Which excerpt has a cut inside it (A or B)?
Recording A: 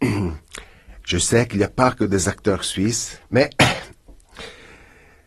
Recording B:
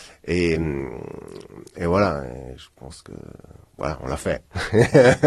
A